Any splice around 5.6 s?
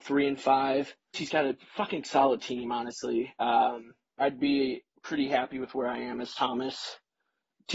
no; 2 cuts; at 1.1 s, 4.2 s

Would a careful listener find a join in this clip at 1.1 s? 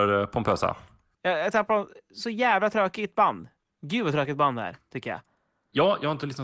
yes; 1 cut; at 1.1 s

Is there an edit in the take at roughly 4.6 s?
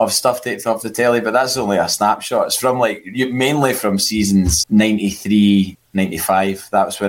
yes; 2 cuts; at 4.6 s, 5.7 s

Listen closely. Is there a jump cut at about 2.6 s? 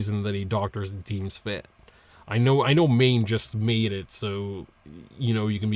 no; 0 cuts

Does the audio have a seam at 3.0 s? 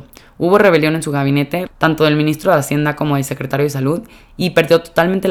no; 1 cut; at 1.7 s

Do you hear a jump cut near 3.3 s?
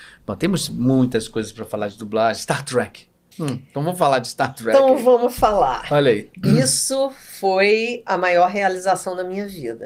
yes; 1 cut; at 3.3 s

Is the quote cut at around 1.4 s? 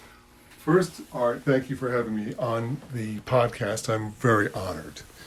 yes; 1 cut; at 1.4 s

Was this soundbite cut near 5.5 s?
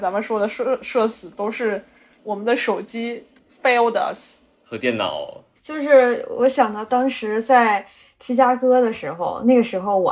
yes; 1 cut; at 5.5 s

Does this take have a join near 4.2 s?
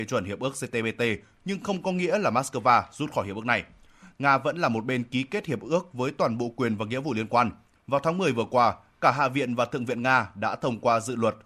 no; 1 cut; at 7.8 s

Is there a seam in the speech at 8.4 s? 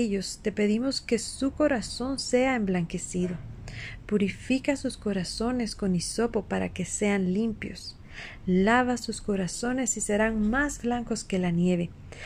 no; 0 cuts

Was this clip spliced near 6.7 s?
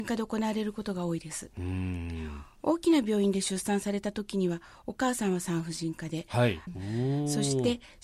yes; 1 cut; at 6.7 s

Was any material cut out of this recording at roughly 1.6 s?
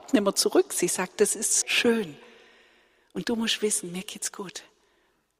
yes; 1 cut; at 1.6 s

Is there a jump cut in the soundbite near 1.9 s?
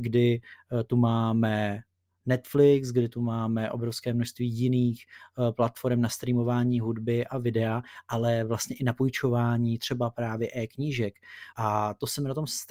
no; 1 cut; at 11.5 s

